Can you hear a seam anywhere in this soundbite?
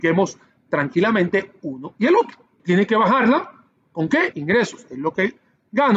yes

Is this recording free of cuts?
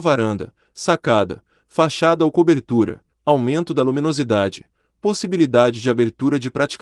no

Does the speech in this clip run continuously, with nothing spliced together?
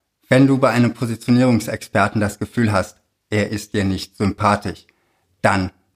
yes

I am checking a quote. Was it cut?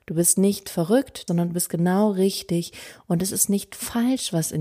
yes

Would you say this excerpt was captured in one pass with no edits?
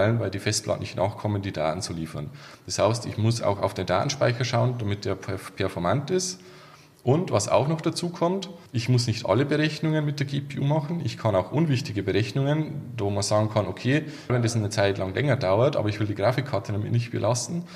no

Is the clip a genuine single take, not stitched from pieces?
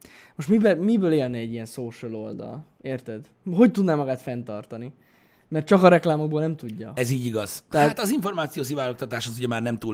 no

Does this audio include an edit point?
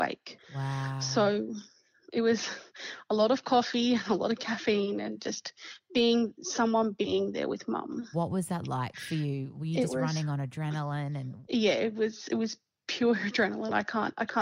yes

